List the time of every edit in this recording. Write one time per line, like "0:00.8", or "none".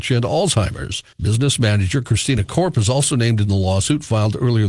0:01.1